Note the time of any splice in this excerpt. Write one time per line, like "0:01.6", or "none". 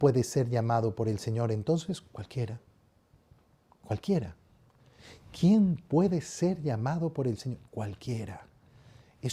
none